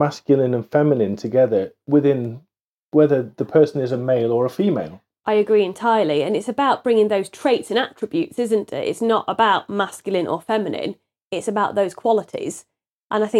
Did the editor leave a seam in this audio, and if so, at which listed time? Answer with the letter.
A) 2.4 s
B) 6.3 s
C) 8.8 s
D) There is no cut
D